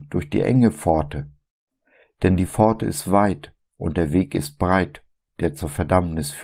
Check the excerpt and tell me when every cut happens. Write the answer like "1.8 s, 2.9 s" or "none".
none